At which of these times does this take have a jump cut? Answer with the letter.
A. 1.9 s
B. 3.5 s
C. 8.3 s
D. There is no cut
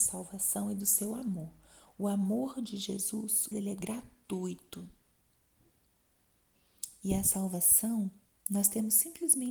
B